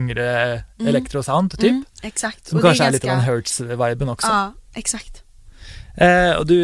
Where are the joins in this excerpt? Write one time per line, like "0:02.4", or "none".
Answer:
none